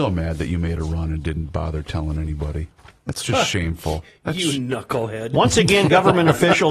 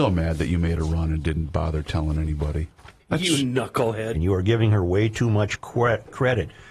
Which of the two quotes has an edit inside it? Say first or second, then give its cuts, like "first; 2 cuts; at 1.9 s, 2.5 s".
second; 2 cuts; at 3.0 s, 4.1 s